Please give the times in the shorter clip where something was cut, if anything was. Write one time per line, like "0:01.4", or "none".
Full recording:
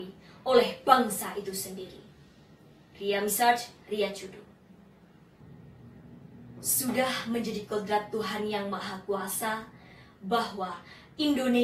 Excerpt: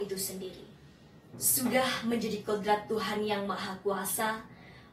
0:01.3

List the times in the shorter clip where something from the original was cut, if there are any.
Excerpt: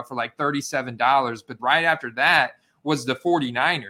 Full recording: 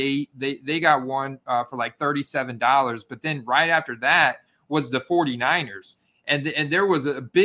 0:01.6

